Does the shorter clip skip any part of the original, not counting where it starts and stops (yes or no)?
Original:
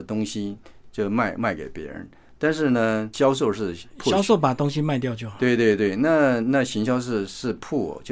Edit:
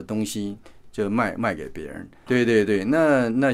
yes